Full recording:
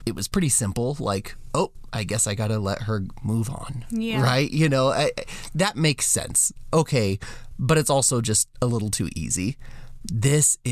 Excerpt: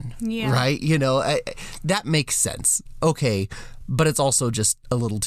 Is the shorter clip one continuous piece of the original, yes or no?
yes